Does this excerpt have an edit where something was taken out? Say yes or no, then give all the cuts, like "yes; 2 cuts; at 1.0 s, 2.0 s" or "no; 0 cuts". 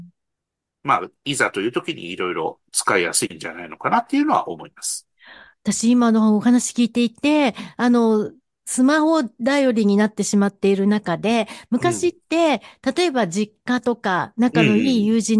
no; 0 cuts